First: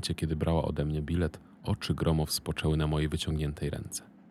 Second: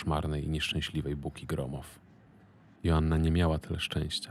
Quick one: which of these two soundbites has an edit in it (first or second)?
second